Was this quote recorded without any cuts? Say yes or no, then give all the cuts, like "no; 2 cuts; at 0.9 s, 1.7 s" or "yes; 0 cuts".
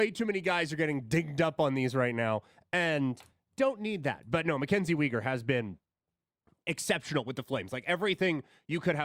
yes; 0 cuts